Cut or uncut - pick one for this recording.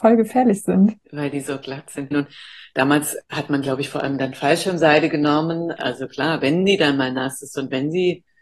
cut